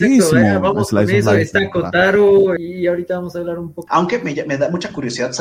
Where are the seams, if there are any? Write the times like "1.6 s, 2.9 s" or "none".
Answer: 2.6 s, 3.9 s